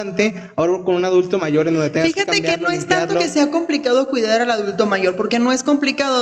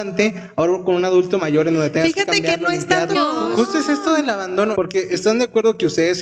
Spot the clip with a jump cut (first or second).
second